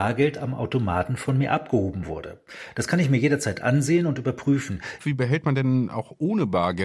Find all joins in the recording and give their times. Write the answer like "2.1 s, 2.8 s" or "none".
5.0 s